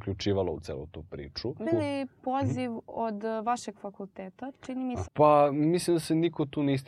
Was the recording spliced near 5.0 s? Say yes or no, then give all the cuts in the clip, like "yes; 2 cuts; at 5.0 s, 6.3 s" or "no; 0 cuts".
yes; 2 cuts; at 1.6 s, 5.0 s